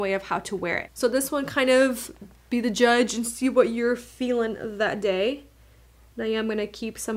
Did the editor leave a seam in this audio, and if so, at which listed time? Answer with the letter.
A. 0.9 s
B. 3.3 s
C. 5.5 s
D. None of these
D